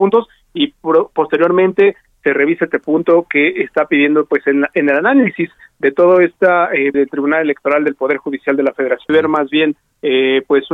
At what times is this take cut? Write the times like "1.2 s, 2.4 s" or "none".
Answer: 6.9 s, 9.1 s